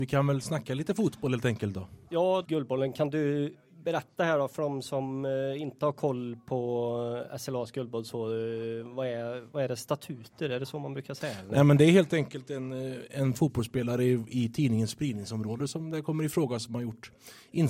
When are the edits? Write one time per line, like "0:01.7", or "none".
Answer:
0:02.4